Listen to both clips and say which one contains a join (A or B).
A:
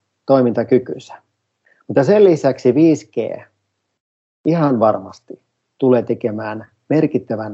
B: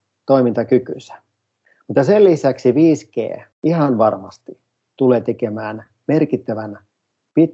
B